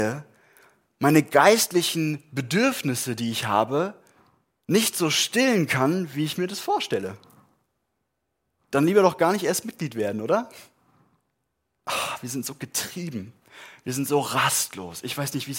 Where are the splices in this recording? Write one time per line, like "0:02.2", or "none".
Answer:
0:11.8